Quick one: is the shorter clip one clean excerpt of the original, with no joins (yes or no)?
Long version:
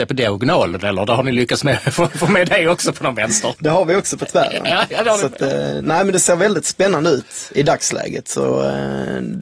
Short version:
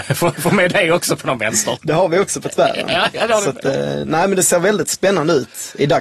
yes